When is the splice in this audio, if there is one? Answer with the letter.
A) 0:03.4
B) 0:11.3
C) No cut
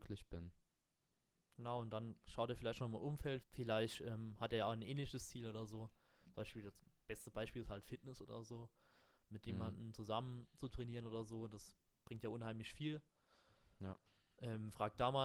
A